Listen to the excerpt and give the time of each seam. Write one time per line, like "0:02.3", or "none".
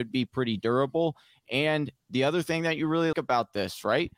0:02.0
0:03.1